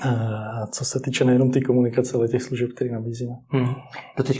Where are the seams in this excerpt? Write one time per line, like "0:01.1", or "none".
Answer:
none